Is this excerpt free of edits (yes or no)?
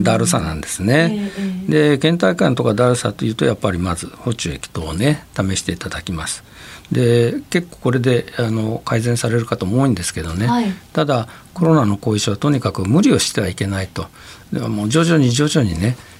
yes